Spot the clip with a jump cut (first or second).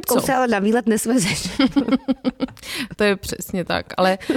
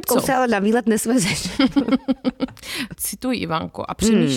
second